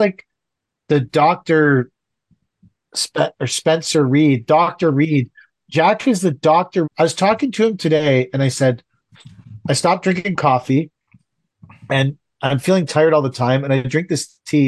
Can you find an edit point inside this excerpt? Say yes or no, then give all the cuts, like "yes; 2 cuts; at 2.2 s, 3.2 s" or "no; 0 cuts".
yes; 1 cut; at 6.8 s